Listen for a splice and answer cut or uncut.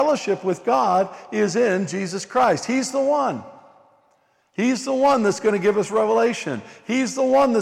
uncut